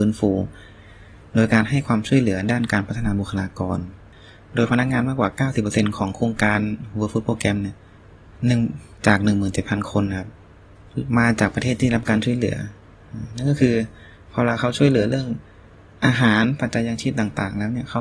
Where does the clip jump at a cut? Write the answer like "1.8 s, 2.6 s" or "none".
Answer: none